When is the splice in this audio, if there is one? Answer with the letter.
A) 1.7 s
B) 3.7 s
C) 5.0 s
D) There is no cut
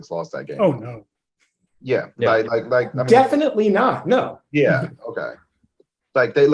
D